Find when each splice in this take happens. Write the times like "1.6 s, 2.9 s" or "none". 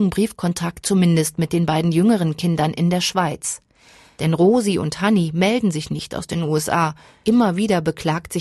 none